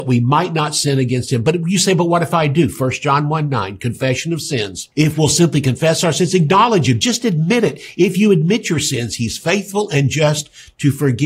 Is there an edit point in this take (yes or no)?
yes